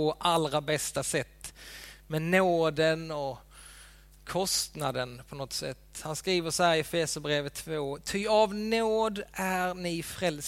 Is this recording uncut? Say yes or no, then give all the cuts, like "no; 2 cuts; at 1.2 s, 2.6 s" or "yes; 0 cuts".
yes; 0 cuts